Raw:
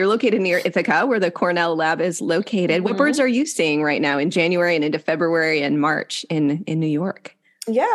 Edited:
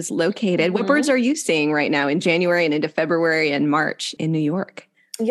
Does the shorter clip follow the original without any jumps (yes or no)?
no